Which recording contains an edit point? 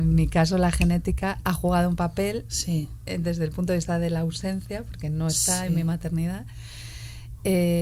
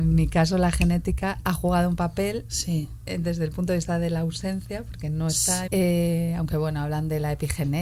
second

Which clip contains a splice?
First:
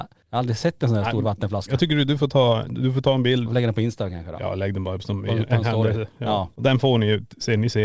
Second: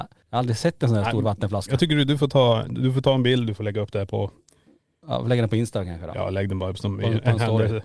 first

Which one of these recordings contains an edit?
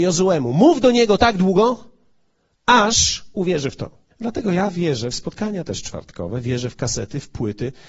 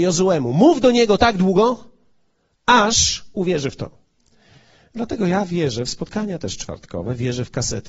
first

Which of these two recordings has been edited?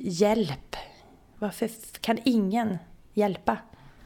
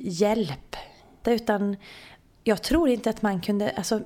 second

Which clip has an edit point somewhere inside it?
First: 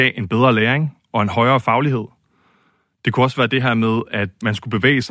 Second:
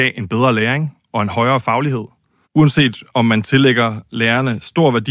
second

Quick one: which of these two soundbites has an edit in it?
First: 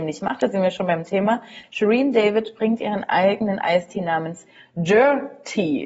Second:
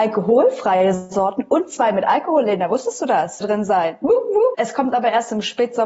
second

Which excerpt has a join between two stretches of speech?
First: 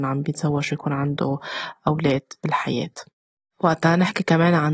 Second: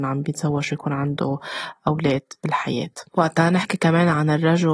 second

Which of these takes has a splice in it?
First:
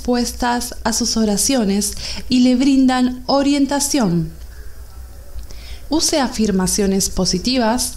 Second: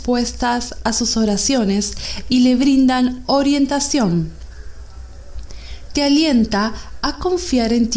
first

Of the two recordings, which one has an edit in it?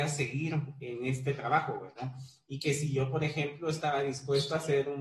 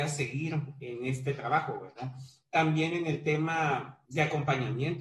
second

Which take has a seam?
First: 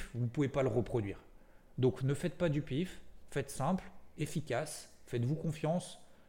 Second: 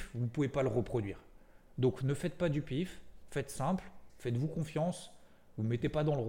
second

